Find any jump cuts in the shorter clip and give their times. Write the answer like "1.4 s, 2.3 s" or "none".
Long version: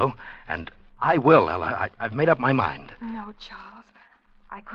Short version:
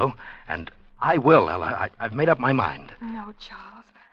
none